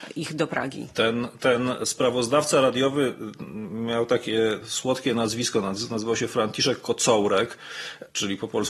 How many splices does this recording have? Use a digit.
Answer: 0